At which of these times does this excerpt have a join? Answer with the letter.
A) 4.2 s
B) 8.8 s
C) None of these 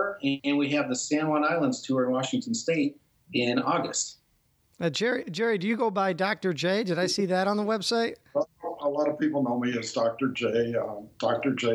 C